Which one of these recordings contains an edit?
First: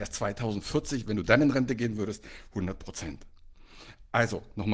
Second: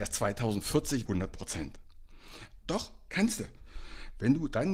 second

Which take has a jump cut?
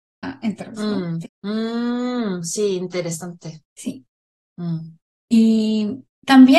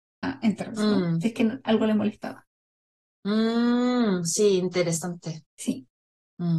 first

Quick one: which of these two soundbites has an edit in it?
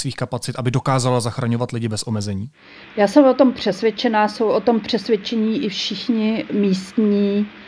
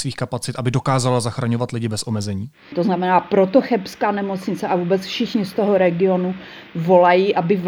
second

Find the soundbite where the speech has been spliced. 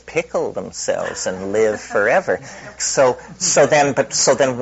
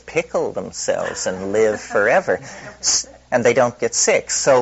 first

